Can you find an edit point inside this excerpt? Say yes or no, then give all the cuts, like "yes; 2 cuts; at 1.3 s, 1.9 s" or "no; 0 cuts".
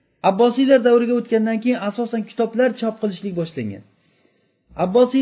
no; 0 cuts